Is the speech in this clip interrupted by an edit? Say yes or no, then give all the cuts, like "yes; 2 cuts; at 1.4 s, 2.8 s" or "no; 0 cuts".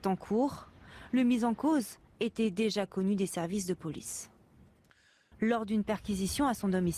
yes; 1 cut; at 5.3 s